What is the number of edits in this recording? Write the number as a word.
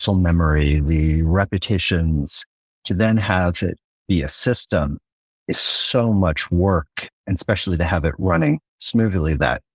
zero